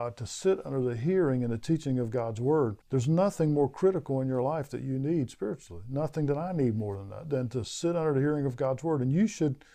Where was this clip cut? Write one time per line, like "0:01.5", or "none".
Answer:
0:02.8